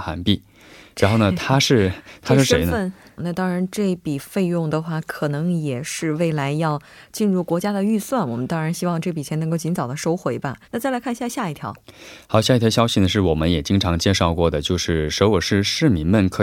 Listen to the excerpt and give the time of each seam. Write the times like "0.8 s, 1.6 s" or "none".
3.2 s, 10.6 s

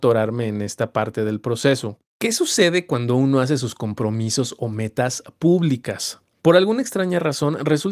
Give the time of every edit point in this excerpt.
2.1 s

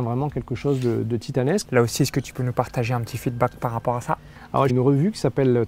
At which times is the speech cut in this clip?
1.6 s, 4.7 s

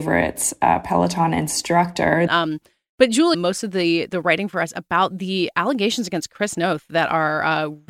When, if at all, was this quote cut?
2.3 s, 3.3 s

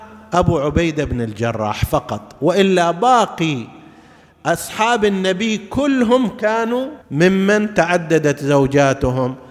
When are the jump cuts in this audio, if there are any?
7.0 s

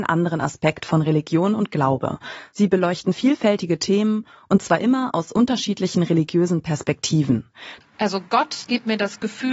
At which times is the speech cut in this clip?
7.8 s

